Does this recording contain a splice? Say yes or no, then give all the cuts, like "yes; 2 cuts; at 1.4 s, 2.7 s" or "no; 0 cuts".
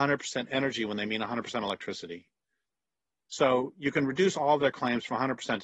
no; 0 cuts